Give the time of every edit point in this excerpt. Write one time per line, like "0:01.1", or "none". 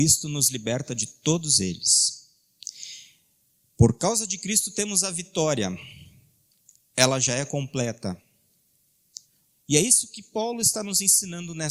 0:09.5